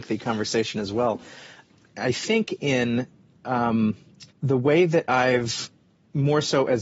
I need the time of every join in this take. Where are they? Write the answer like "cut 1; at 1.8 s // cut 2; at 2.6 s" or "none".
cut 1; at 1.9 s // cut 2; at 4.3 s